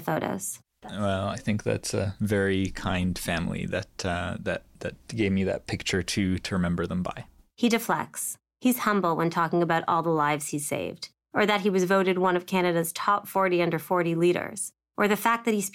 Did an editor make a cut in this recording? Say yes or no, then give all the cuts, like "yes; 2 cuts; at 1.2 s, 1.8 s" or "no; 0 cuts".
no; 0 cuts